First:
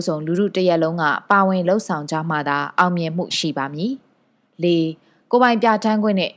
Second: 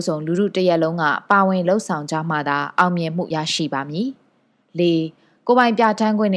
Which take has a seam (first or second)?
first